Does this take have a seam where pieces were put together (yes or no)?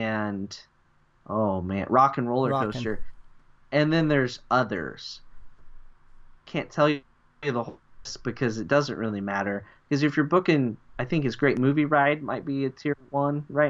no